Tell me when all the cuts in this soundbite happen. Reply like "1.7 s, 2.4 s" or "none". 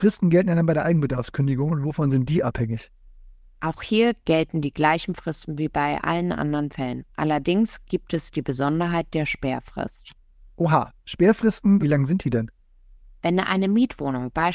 11.8 s

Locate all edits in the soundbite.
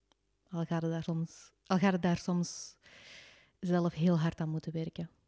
1.1 s

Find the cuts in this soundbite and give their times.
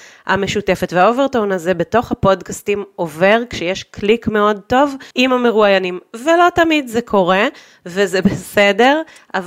5.1 s

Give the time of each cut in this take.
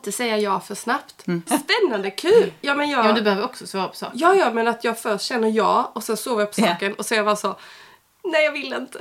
1.5 s

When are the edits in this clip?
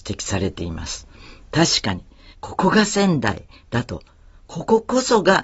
2.3 s

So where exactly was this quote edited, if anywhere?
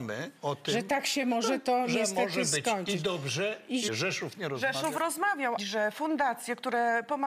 3.9 s, 5.6 s

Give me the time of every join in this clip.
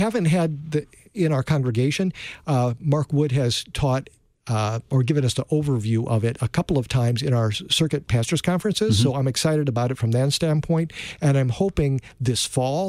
none

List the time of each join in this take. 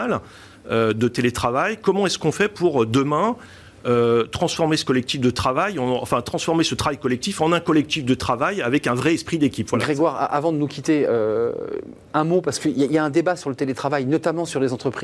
none

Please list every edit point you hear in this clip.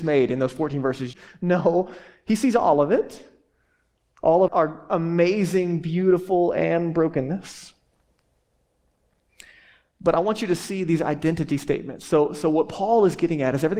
1.1 s, 4.5 s

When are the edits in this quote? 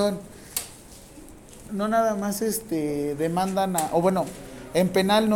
1.6 s

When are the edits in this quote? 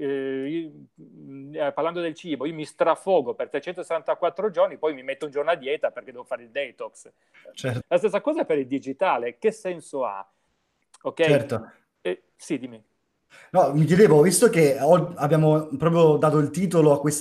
7.8 s

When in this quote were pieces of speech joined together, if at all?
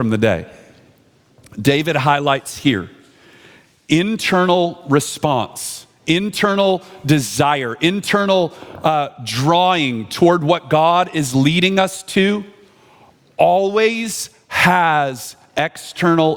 none

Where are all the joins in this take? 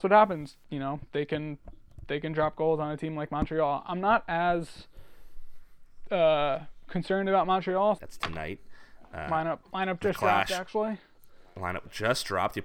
8.0 s

